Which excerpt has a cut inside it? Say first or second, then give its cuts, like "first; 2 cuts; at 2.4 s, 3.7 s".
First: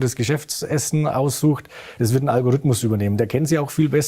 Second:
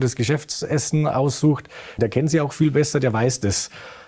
second; 1 cut; at 2.0 s